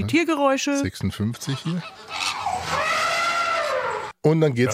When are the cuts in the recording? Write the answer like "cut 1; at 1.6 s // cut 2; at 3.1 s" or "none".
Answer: none